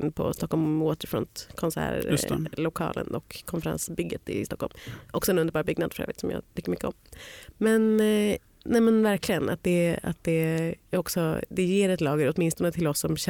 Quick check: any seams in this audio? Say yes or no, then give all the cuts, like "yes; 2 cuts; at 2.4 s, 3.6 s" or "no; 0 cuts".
yes; 1 cut; at 10.8 s